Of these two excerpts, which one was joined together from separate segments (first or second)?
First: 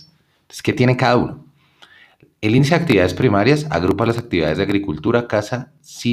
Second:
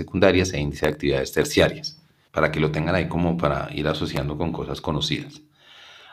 second